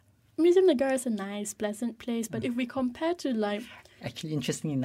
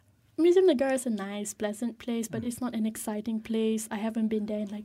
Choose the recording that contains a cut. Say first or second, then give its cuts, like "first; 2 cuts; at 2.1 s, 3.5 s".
first; 1 cut; at 2.4 s